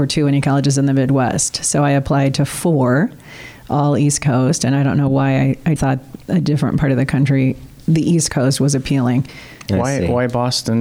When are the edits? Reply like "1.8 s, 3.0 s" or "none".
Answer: 5.8 s, 9.7 s